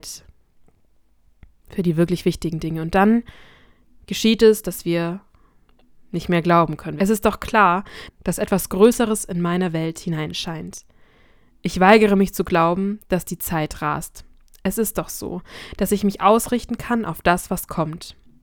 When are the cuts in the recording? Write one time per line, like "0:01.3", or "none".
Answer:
0:07.0
0:08.1